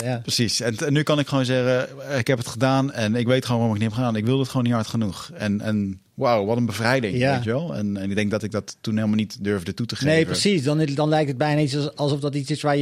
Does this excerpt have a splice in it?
no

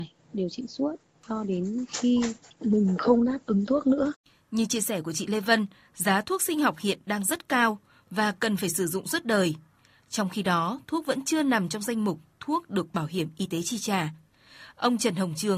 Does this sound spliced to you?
no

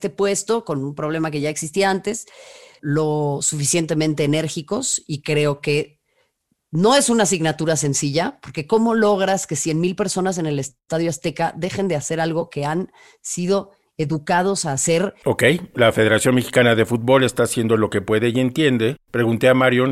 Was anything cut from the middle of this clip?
yes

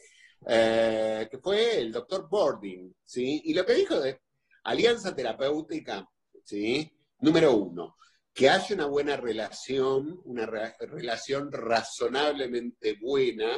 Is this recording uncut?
no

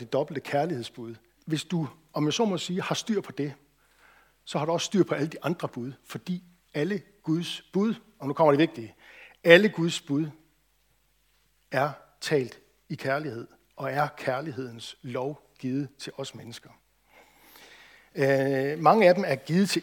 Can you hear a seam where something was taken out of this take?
yes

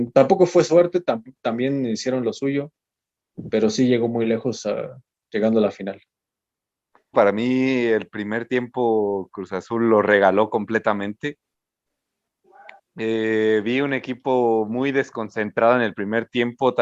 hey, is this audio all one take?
no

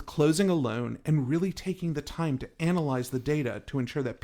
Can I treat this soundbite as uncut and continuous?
yes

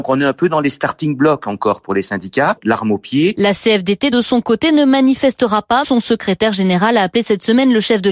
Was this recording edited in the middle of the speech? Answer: yes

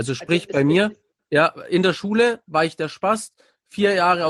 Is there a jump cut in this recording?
yes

